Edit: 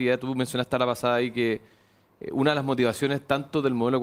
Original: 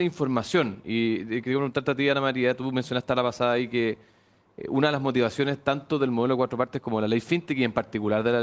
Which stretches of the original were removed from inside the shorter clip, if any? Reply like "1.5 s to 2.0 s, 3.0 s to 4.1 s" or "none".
none